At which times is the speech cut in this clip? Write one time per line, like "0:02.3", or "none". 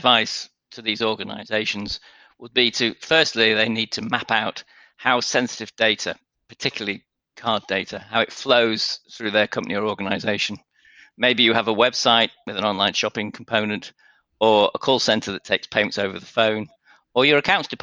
none

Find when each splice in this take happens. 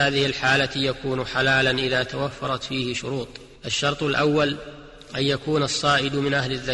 0:03.6

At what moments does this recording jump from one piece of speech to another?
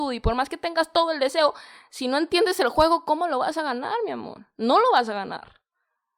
none

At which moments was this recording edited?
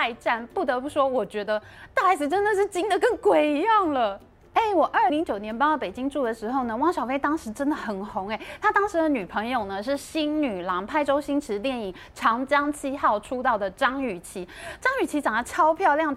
0:05.1

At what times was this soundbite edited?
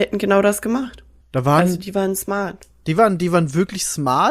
0:01.2

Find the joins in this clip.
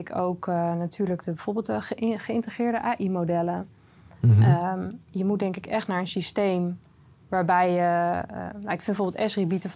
none

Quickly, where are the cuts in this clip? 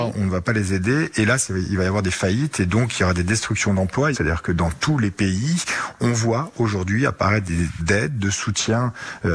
0:04.1
0:07.8

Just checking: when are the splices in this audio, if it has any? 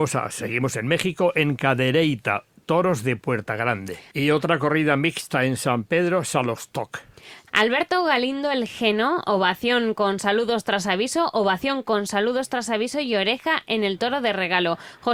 0:04.1
0:07.5

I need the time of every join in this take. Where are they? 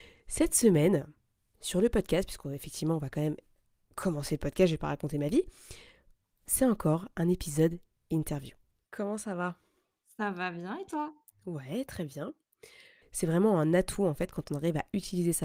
0:08.8
0:13.0

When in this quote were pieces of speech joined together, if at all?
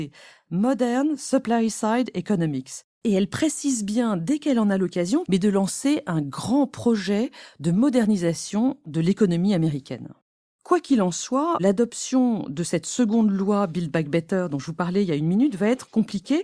0:05.3

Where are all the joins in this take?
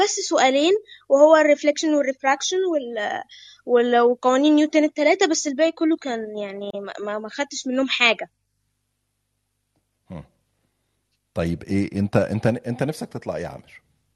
none

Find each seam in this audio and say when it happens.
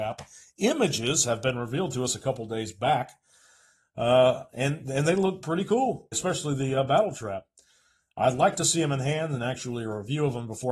0:06.1

